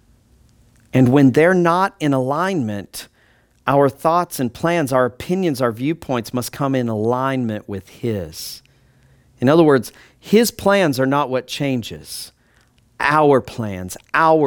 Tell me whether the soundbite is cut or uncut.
uncut